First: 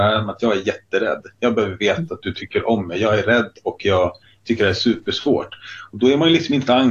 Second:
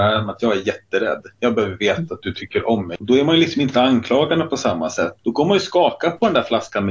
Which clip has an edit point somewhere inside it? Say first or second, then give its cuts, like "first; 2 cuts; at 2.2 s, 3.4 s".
second; 2 cuts; at 3.0 s, 5.2 s